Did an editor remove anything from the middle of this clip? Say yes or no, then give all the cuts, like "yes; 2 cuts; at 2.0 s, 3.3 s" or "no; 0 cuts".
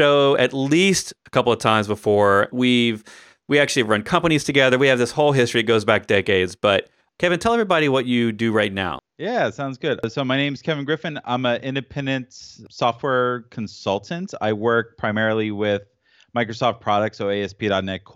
yes; 2 cuts; at 2.5 s, 9.0 s